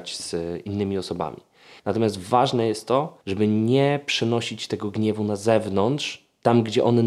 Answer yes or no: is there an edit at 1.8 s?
yes